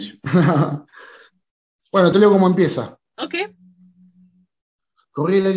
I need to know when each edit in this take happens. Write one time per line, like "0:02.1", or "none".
0:02.1